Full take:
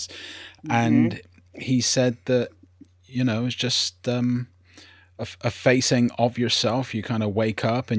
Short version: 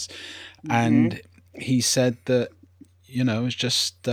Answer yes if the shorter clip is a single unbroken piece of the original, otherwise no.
yes